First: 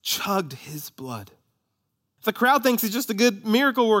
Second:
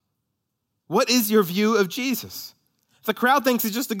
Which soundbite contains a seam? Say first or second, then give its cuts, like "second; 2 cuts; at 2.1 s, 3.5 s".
first; 1 cut; at 2.2 s